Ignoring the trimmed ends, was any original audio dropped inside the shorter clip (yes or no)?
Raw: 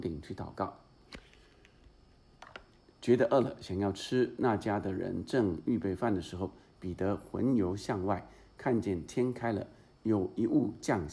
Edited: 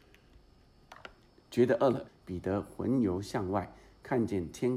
yes